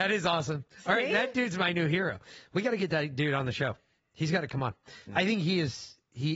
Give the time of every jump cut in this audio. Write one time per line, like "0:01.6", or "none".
0:05.1